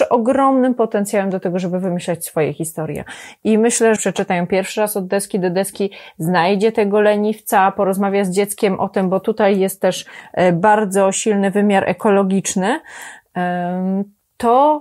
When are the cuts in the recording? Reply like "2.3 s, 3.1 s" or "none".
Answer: 4.0 s